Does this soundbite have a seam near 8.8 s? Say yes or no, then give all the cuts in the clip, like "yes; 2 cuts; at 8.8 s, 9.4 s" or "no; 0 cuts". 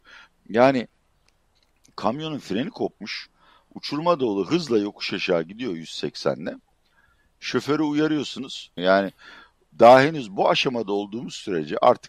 yes; 1 cut; at 8.8 s